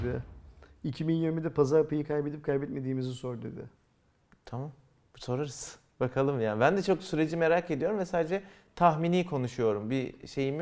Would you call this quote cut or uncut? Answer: uncut